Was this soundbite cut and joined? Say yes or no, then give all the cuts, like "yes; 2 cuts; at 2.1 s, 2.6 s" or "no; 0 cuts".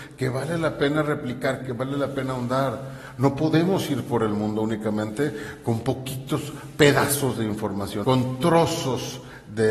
yes; 2 cuts; at 1.6 s, 8.0 s